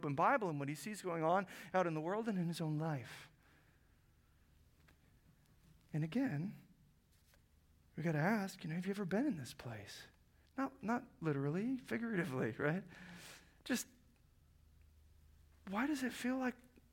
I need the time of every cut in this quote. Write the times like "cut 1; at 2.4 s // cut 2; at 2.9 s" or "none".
cut 1; at 10.5 s